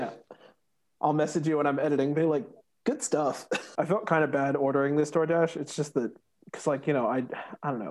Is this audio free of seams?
no; 1 cut; at 3.7 s

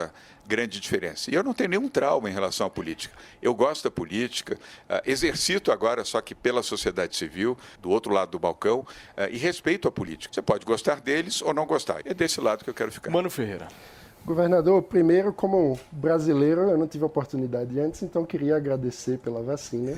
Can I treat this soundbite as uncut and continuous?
no; 3 cuts; at 7.7 s, 10.3 s, 12.0 s

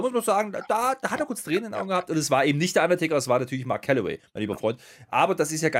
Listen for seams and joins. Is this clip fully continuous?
yes; 0 cuts

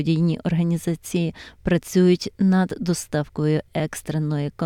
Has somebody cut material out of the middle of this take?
no; 0 cuts

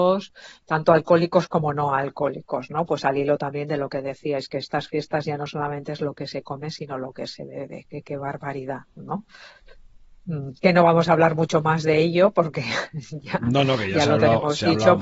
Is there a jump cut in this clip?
no; 0 cuts

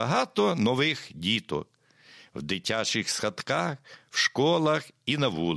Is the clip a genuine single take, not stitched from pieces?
yes; 0 cuts

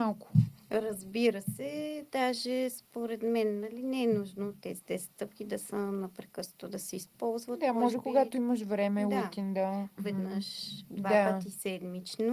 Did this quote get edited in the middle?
yes; 1 cut; at 10.0 s

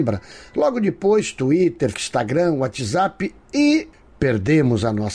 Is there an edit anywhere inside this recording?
yes; 1 cut; at 1.9 s

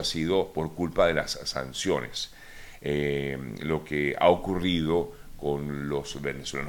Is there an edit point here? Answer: no; 0 cuts

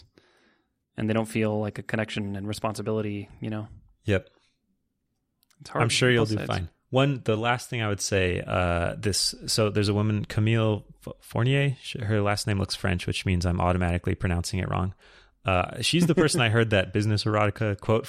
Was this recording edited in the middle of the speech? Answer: no; 0 cuts

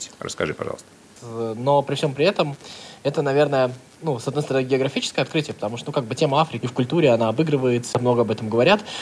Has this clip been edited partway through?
yes; 3 cuts; at 1.2 s, 6.6 s, 7.9 s

